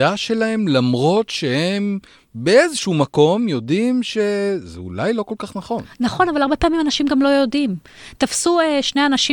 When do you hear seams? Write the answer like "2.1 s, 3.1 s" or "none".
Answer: none